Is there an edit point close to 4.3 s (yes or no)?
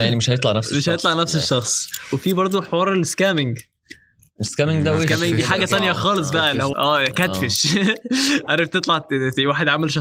no